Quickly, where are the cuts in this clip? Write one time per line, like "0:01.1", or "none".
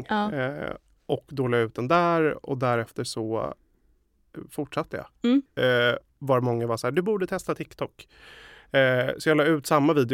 0:05.5